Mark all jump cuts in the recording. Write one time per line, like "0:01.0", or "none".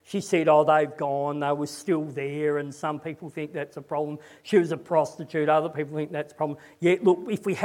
none